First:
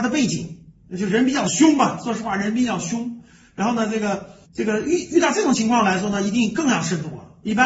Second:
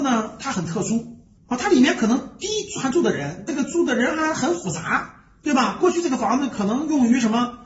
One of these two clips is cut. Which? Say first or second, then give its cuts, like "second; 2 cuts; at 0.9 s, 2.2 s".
second; 1 cut; at 3.5 s